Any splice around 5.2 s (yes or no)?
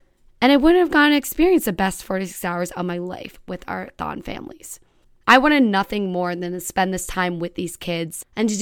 yes